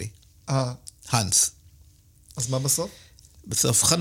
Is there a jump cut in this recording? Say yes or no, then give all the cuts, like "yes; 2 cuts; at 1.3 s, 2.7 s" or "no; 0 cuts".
no; 0 cuts